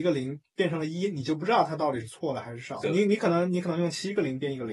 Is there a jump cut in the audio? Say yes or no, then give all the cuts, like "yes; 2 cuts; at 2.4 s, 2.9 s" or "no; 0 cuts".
yes; 1 cut; at 2.8 s